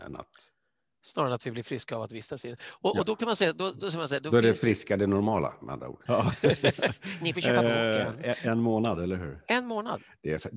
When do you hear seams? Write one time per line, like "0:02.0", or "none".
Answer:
0:06.1